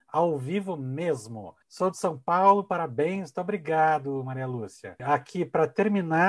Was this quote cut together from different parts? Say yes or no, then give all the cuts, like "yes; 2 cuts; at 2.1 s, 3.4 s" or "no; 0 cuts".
no; 0 cuts